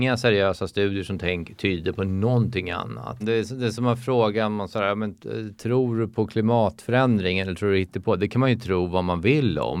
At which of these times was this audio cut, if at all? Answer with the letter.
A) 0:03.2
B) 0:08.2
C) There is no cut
A